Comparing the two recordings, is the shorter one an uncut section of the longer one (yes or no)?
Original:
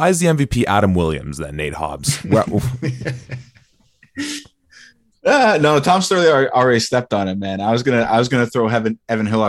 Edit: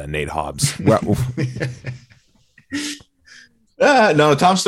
yes